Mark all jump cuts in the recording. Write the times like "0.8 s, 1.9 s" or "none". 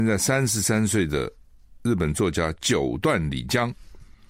none